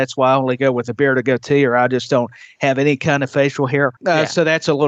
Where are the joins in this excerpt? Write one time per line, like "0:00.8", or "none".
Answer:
0:04.0